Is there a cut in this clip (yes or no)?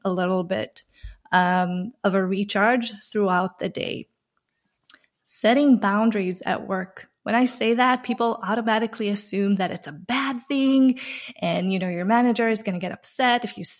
no